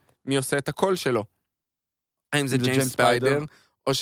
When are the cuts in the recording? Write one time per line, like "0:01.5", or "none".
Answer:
none